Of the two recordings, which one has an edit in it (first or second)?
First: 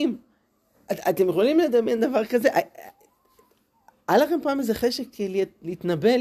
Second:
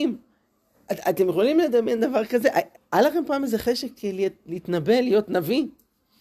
second